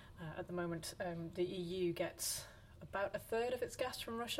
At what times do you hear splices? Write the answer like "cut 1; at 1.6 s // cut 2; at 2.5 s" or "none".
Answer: none